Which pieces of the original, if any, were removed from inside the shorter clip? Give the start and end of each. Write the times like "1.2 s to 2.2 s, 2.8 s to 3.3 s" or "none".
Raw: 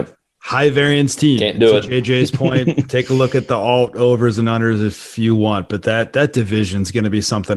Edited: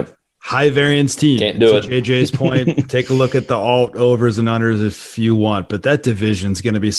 5.8 s to 6.1 s